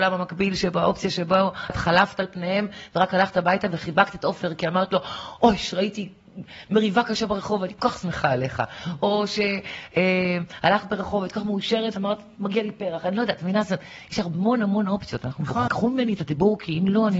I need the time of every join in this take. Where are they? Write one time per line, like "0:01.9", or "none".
0:01.7
0:15.7

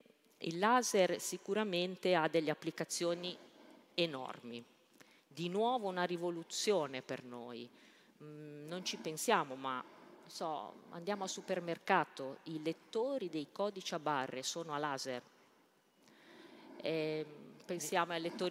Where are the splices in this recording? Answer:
none

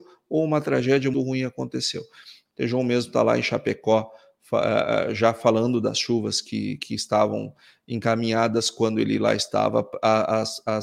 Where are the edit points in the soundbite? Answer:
0:01.1
0:02.5
0:06.8

